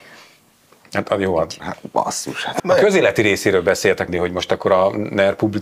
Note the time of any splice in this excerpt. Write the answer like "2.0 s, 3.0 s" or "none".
1.6 s, 2.6 s, 4.1 s